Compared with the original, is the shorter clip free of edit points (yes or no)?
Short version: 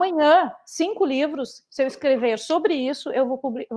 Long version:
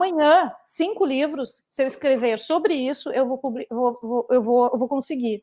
yes